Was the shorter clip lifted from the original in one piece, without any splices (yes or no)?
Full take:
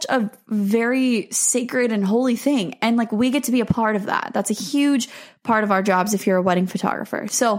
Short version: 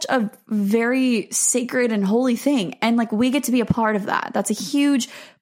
yes